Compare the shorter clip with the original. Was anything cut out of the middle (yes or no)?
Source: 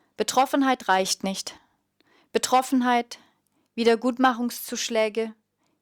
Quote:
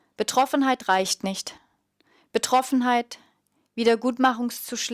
no